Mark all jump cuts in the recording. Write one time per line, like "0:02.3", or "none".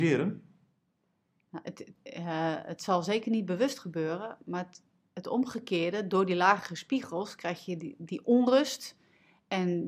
0:02.0